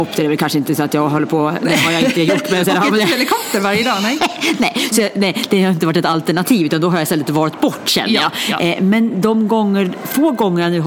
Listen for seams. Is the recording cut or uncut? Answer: uncut